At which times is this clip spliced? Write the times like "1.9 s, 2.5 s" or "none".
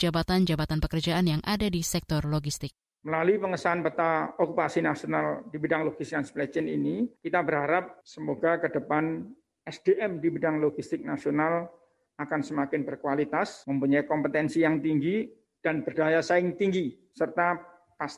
none

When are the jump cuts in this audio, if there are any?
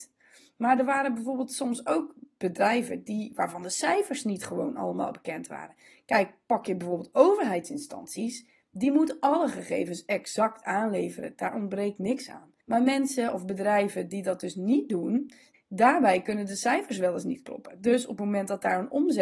12.6 s, 15.5 s

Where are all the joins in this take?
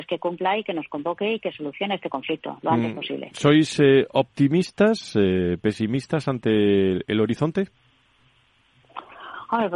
none

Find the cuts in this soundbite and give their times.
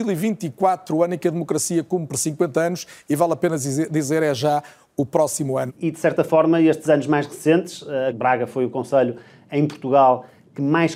5.7 s, 8.1 s

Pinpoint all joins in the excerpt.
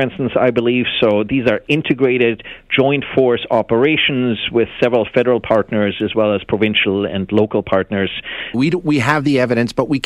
8.5 s

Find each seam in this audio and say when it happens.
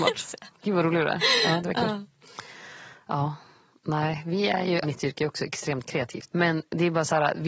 4.8 s, 6.3 s

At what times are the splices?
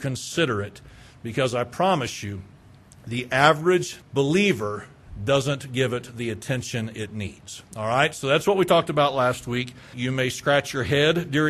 4.0 s, 9.9 s

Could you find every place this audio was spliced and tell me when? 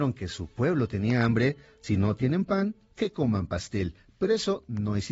none

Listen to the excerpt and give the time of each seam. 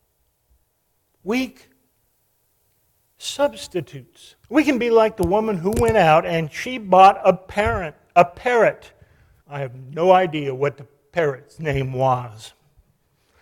4.4 s, 9.4 s

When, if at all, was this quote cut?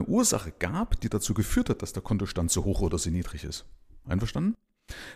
none

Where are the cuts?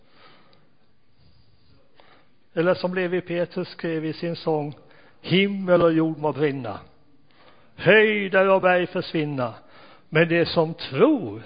none

